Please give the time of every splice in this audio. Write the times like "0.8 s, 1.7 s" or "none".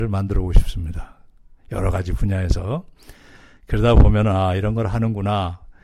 none